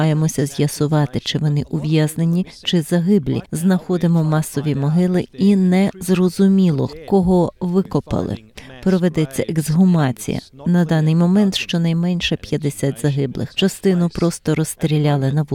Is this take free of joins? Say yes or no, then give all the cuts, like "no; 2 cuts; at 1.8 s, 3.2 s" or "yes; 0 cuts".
yes; 0 cuts